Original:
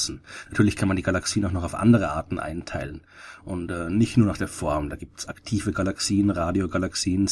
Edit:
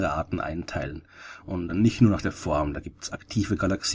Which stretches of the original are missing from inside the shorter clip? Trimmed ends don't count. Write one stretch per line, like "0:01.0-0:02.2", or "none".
0:03.7-0:03.8

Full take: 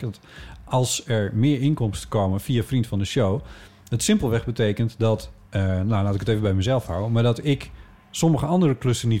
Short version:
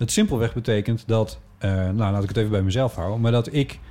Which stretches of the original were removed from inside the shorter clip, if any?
none

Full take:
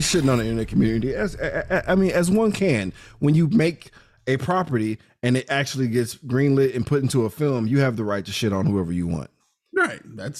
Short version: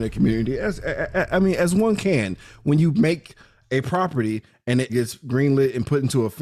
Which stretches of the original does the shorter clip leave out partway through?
0:05.5-0:05.9

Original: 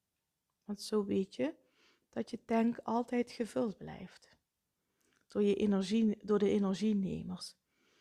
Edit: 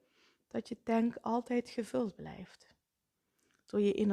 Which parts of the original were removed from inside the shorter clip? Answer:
none

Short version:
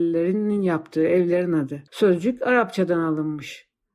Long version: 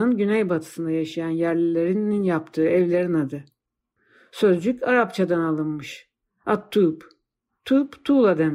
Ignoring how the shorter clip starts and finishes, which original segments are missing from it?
0:03.5-0:04.3

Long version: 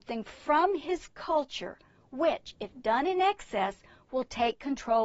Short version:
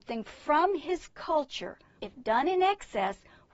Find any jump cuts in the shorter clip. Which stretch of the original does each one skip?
0:02.0-0:02.6

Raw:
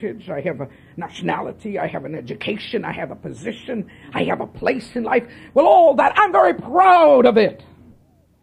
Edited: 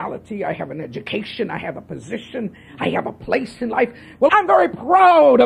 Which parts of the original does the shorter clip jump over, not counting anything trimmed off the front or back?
0:05.6-0:06.1

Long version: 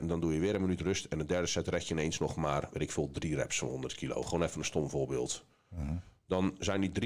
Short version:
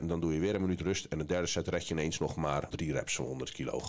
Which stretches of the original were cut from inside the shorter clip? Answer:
0:02.7-0:03.1

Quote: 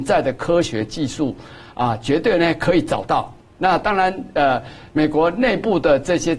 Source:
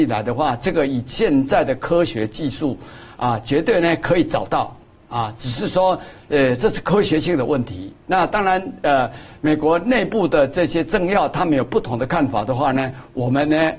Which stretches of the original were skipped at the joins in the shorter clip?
0:05.0-0:08.0

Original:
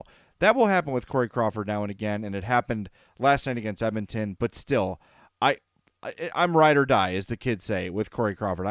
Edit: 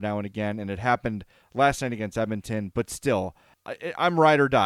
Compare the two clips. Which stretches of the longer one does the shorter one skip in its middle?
0:05.2-0:05.9

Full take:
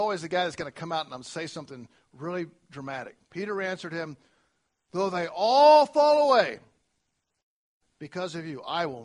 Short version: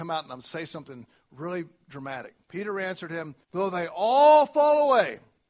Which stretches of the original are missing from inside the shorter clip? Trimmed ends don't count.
0:04.2-0:04.8

